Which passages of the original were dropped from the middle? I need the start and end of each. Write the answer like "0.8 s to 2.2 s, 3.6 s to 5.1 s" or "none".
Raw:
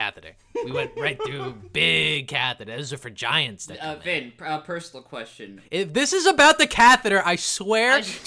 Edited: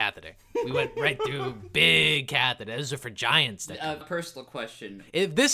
4.0 s to 4.6 s